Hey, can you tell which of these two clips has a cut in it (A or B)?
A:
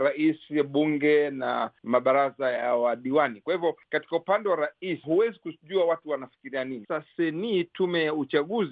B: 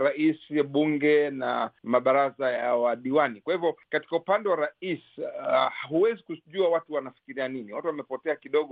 A